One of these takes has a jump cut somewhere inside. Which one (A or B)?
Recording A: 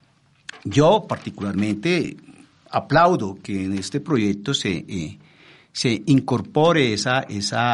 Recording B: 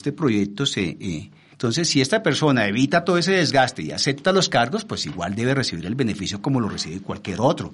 B